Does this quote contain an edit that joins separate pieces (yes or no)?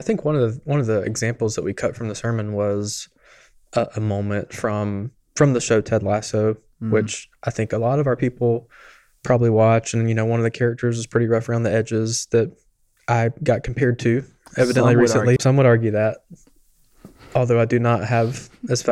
yes